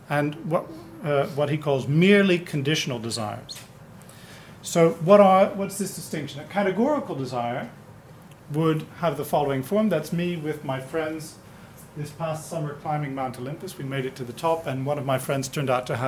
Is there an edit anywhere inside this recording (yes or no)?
no